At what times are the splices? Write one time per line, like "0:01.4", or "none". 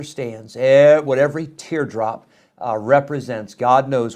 none